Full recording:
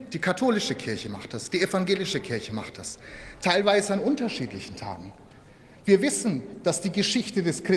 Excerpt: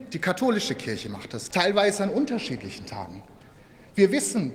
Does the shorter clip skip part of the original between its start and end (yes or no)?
yes